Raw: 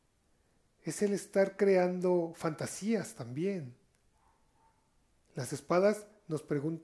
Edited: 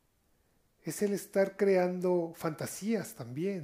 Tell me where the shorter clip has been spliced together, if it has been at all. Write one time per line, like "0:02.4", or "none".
none